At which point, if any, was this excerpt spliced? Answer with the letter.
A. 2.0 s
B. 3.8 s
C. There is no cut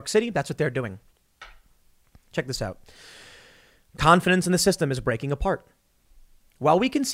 C